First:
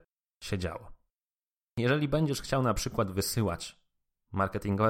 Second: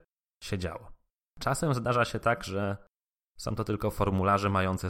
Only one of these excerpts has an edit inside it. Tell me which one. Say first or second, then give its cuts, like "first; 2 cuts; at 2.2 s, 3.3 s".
second; 1 cut; at 1.3 s